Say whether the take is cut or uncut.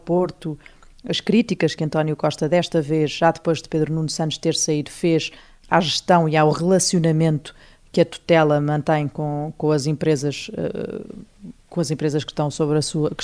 uncut